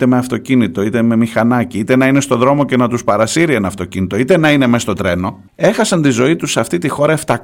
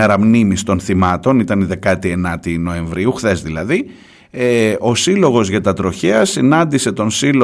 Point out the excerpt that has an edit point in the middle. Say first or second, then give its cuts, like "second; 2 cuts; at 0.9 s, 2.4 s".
first; 1 cut; at 5.5 s